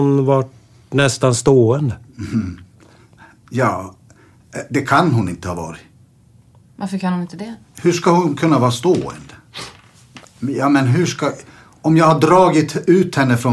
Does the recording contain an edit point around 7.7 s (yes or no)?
no